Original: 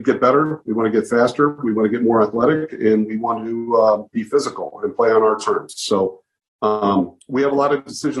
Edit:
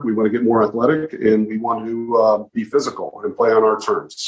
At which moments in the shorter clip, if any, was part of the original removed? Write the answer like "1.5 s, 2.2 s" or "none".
none